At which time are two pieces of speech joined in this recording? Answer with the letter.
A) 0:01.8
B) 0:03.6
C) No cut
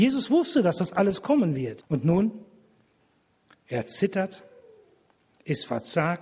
A